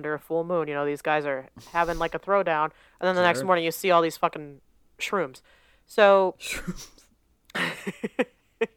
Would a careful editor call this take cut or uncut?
uncut